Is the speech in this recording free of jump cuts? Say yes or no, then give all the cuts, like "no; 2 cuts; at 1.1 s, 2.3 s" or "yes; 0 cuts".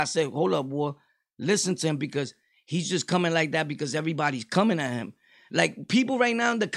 yes; 0 cuts